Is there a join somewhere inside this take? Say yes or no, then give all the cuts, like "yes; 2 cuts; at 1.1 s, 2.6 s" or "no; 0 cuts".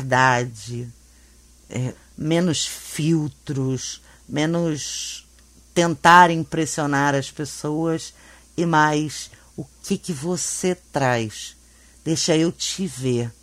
yes; 1 cut; at 1.9 s